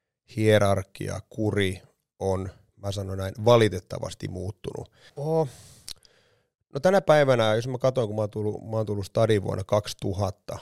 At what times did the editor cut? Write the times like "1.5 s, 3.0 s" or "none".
5.1 s